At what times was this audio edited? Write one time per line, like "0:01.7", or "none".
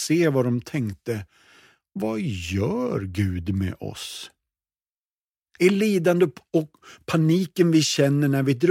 0:05.6